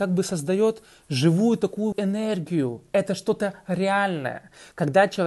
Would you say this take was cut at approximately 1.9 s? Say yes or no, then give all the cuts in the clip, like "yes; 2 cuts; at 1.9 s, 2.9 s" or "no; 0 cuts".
yes; 1 cut; at 1.9 s